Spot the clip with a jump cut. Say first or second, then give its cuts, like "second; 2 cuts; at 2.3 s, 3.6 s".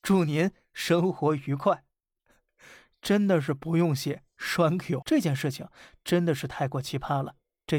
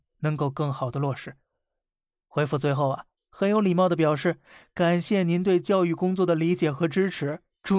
first; 1 cut; at 5.0 s